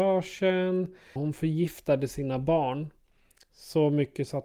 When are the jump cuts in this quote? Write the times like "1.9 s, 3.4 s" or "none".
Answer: 1.2 s

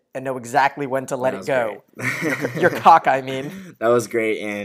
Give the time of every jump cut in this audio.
none

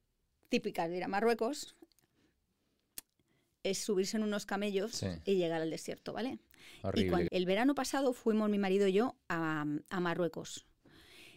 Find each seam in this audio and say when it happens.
7.3 s

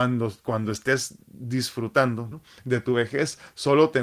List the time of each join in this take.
2.3 s

